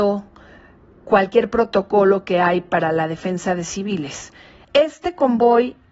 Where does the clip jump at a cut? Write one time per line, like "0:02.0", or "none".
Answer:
0:04.6